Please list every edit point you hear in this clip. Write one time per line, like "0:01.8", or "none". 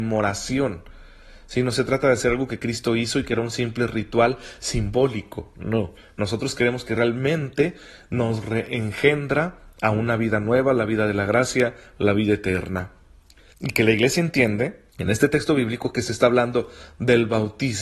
0:13.5
0:14.9